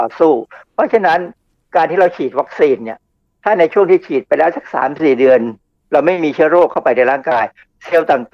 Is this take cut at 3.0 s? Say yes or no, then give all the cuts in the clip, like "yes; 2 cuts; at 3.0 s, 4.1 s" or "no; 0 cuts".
no; 0 cuts